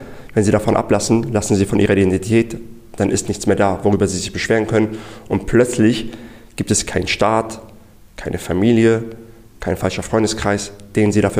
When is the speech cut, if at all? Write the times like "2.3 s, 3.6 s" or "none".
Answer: none